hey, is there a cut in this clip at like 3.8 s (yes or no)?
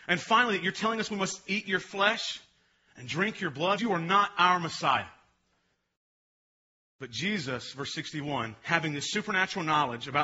yes